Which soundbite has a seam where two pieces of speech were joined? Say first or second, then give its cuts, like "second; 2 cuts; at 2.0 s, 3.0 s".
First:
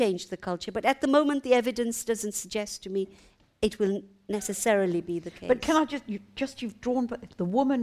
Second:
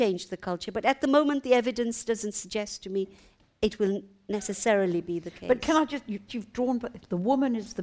second; 1 cut; at 6.3 s